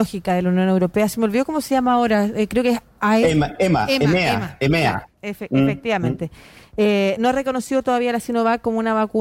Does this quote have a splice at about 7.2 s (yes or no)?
no